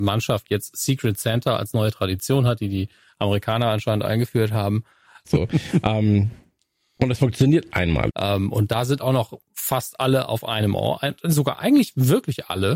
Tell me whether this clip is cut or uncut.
cut